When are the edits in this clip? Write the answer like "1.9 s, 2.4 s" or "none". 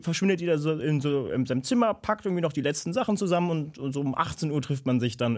none